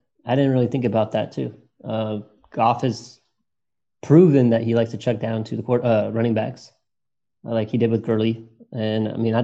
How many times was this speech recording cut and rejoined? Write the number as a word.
zero